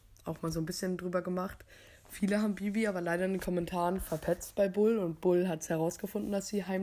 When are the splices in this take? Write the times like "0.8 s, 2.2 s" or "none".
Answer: none

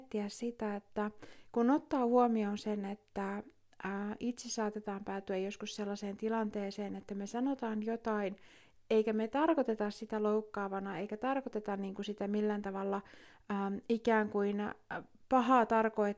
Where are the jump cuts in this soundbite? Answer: none

